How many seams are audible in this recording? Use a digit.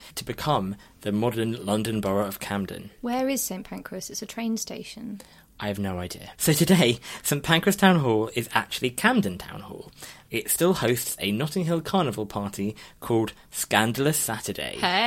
2